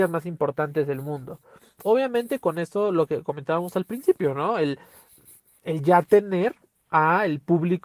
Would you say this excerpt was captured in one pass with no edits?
yes; 0 cuts

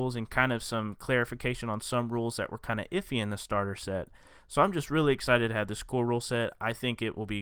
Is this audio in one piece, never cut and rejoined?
yes; 0 cuts

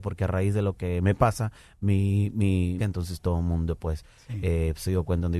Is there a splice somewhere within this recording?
yes; 1 cut; at 2.8 s

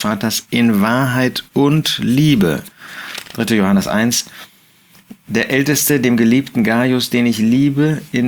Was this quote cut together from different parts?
no; 0 cuts

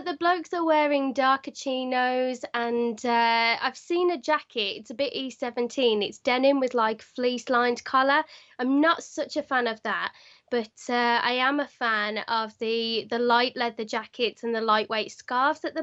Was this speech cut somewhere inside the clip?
no; 0 cuts

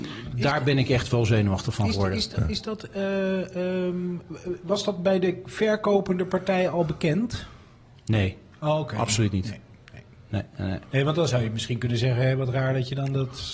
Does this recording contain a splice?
no; 0 cuts

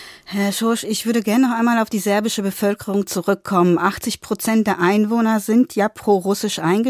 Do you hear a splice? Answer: no; 0 cuts

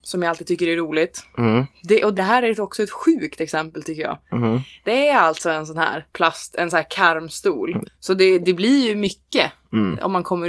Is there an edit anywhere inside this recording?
yes; 3 cuts; at 2.2 s, 6.1 s, 7.8 s

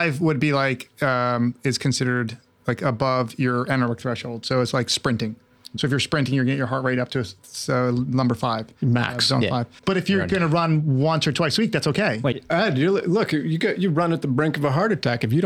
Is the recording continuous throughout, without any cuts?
no; 2 cuts; at 9.8 s, 12.3 s

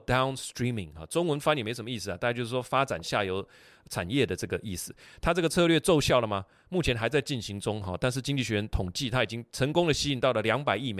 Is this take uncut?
yes; 0 cuts

